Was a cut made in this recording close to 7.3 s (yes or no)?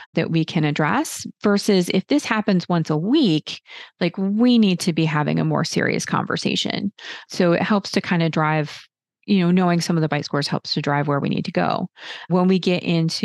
no